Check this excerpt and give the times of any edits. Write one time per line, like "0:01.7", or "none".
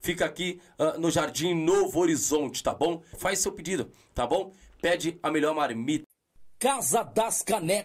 0:03.1